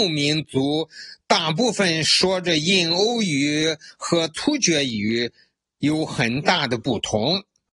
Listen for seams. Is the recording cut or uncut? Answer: uncut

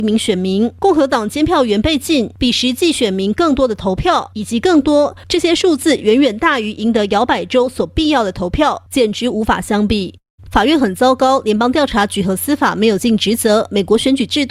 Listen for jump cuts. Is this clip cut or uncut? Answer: uncut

